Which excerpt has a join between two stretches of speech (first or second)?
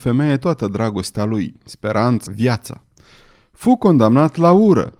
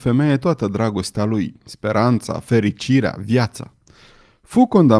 first